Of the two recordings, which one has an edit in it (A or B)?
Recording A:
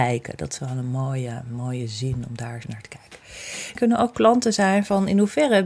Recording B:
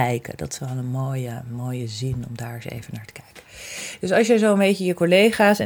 A